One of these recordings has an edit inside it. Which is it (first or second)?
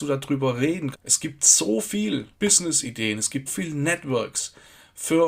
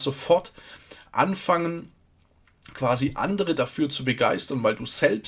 first